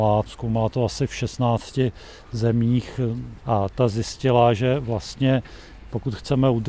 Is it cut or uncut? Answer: cut